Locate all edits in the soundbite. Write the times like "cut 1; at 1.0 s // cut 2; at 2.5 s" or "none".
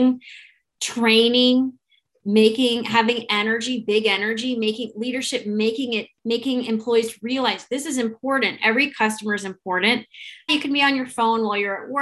cut 1; at 8.6 s // cut 2; at 10.5 s